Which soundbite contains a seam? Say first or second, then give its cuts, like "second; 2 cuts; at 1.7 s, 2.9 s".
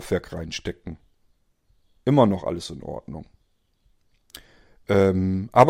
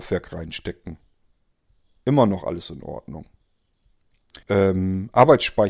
second; 1 cut; at 4.4 s